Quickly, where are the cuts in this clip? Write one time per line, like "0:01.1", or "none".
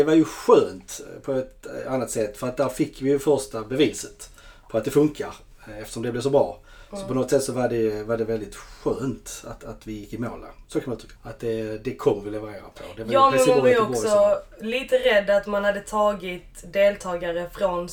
0:11.2